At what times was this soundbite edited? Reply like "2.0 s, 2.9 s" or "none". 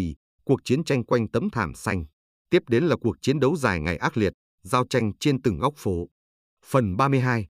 2.3 s